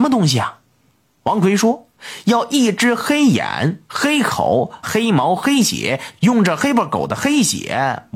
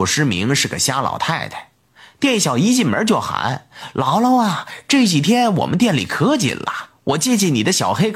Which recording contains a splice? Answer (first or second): first